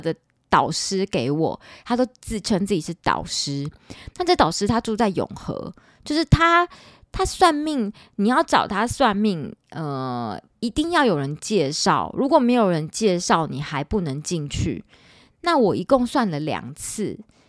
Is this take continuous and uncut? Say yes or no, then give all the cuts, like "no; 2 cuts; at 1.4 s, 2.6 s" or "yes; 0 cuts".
yes; 0 cuts